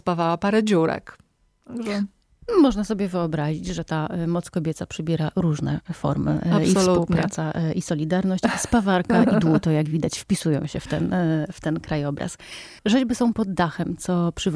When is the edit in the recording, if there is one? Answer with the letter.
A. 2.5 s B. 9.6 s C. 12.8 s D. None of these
C